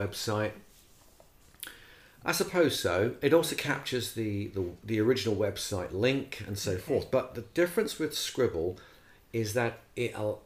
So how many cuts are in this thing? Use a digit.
1